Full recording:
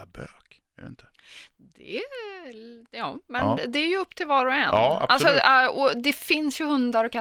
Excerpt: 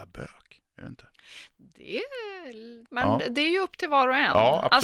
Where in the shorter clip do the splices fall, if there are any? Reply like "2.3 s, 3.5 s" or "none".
2.9 s